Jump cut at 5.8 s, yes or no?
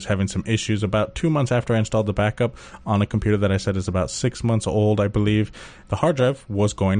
yes